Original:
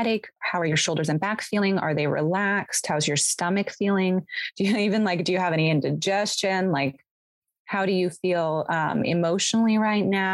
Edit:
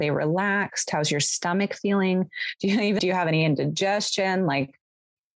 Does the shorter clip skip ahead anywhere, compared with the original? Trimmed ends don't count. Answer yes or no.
yes